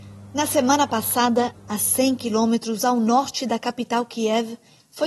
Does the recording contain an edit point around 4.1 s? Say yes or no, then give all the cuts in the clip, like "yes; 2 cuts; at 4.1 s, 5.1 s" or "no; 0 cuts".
no; 1 cut; at 1.5 s